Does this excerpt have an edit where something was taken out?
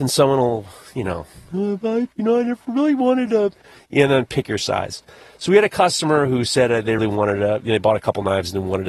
yes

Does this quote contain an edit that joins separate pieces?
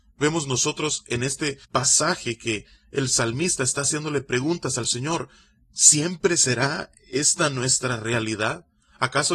yes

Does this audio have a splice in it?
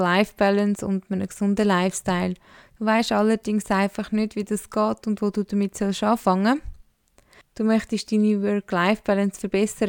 yes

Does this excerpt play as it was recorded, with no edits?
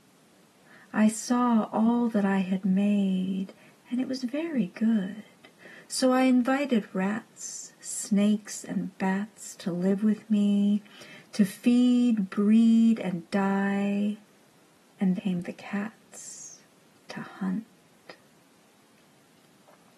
no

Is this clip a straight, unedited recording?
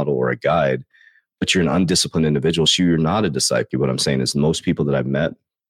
no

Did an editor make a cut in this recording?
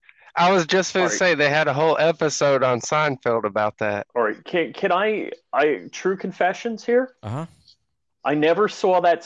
no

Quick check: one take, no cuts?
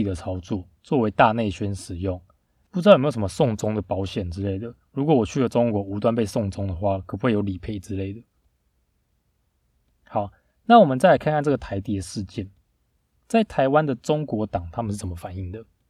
no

